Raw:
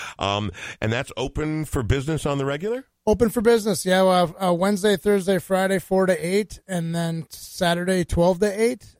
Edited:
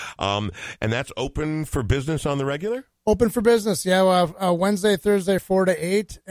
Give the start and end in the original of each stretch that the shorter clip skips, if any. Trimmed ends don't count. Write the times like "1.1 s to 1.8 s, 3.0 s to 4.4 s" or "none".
5.4 s to 5.8 s